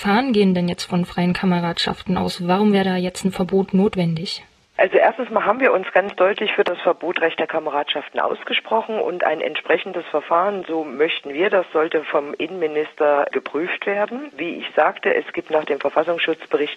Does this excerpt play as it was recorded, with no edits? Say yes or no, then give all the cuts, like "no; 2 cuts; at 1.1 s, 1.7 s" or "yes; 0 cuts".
no; 1 cut; at 14.3 s